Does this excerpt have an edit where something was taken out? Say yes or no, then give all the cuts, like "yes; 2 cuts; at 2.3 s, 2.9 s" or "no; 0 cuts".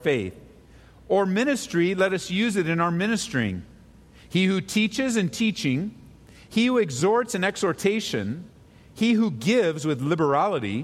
no; 0 cuts